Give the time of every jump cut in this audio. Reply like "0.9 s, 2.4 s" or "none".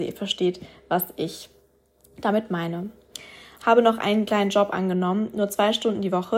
3.5 s